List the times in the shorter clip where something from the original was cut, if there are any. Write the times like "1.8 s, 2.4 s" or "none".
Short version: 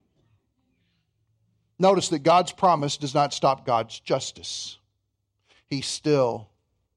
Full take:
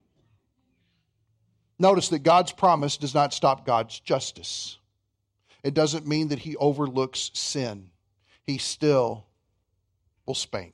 5.5 s